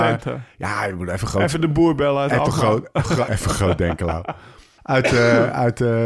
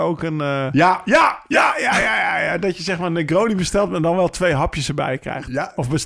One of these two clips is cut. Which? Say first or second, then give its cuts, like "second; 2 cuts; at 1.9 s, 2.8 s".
first; 2 cuts; at 3.3 s, 4.8 s